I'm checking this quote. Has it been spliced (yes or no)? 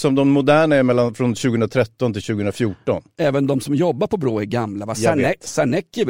no